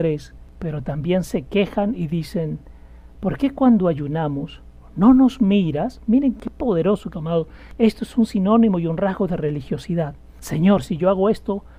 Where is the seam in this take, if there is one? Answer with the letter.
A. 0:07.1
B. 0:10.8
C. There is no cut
A